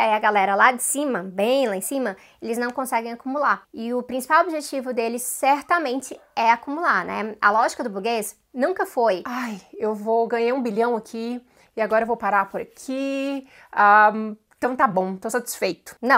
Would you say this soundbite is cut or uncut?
uncut